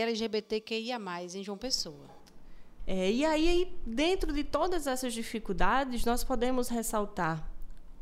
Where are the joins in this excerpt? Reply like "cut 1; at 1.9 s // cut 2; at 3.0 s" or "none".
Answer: cut 1; at 2.8 s